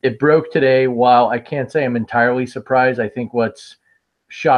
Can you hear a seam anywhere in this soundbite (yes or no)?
no